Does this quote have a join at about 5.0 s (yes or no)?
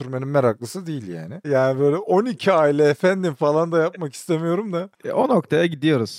no